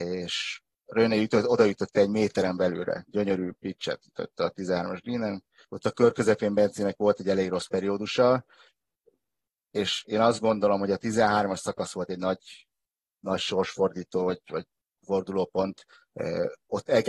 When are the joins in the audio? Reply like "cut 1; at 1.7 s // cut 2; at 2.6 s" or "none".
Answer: cut 1; at 5.6 s